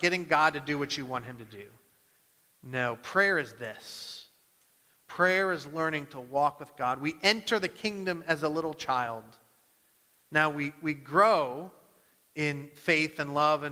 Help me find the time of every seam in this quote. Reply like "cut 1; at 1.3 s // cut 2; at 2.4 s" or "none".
none